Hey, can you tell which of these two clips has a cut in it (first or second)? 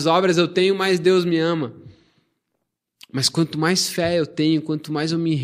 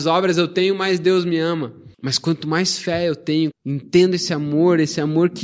second